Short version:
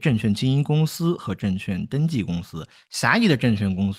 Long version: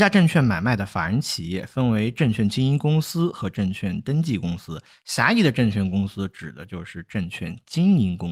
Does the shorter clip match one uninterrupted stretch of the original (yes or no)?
yes